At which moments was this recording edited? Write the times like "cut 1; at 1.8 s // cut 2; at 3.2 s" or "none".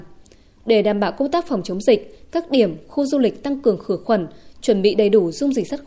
none